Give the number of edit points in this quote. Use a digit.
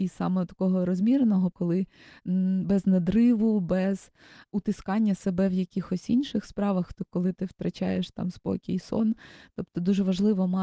1